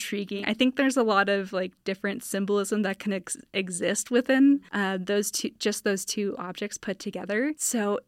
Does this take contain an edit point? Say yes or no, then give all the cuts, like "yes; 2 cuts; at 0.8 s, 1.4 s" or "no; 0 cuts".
no; 0 cuts